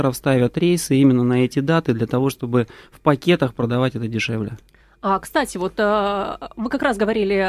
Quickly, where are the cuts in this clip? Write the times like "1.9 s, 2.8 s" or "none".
none